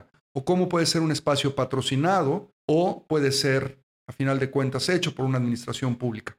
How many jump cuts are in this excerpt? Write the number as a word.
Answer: one